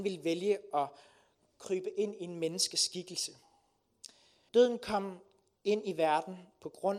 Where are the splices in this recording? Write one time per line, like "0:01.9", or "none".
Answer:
0:04.5